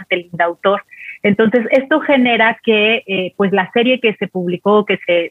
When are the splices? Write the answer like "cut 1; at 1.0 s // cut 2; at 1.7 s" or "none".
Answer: none